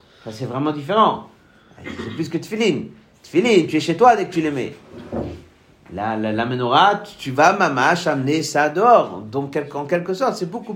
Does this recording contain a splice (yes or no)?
no